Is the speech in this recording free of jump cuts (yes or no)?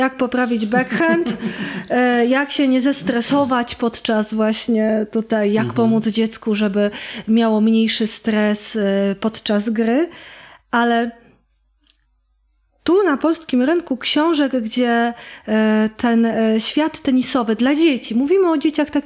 yes